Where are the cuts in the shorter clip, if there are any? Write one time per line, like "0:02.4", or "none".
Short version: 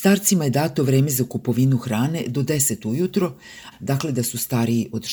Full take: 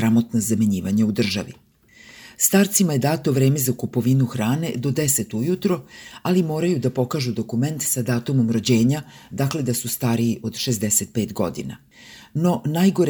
0:03.7